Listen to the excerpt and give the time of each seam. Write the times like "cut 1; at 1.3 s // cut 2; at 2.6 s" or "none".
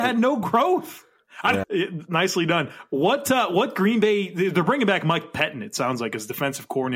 cut 1; at 1.6 s